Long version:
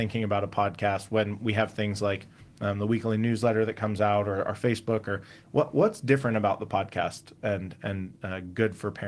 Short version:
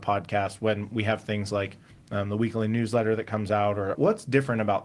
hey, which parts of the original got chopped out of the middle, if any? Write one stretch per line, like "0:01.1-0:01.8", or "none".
0:04.4-0:05.7